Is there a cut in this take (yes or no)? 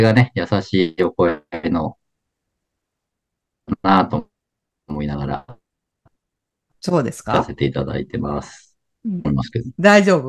yes